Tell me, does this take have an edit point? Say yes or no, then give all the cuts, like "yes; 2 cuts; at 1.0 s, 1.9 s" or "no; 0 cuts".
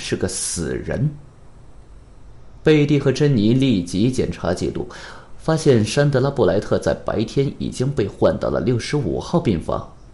no; 0 cuts